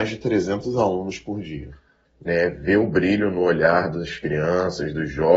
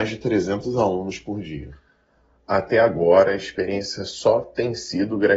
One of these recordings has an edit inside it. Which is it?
first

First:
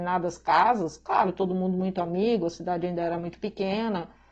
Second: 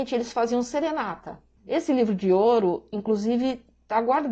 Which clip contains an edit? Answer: second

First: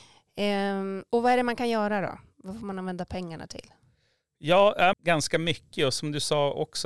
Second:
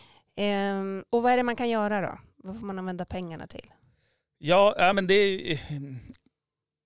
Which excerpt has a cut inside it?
first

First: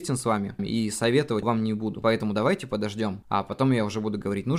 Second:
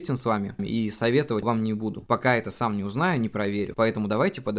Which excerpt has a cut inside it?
first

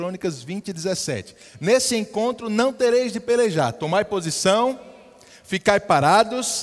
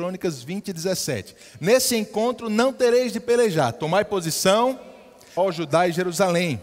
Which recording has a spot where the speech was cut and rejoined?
second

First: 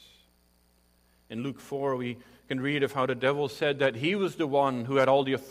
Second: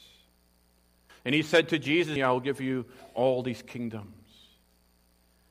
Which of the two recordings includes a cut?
second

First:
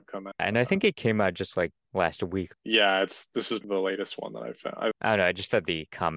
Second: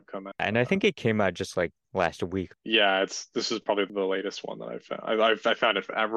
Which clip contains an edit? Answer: first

